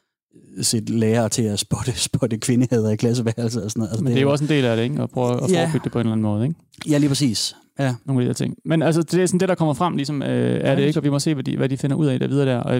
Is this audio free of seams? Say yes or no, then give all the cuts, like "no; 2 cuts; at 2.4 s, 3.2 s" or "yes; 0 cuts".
yes; 0 cuts